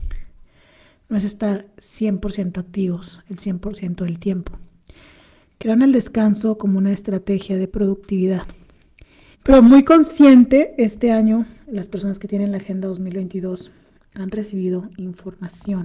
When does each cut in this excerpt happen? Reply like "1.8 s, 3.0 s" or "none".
7.7 s, 9.3 s